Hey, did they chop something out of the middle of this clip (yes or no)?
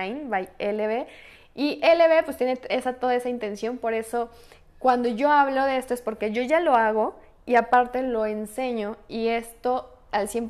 no